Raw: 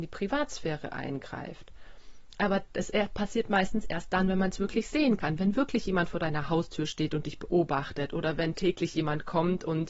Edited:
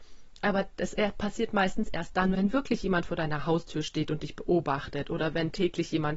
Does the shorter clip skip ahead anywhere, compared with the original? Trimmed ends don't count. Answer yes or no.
yes